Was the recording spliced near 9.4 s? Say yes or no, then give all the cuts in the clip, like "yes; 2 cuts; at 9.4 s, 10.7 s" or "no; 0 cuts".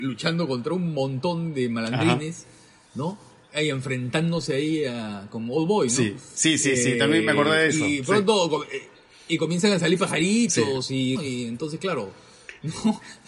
no; 1 cut; at 11.1 s